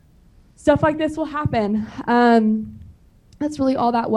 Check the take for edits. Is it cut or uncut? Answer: uncut